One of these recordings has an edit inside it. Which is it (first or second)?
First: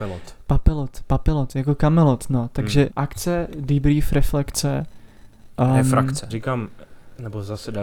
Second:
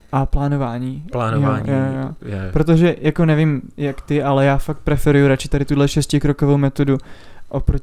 first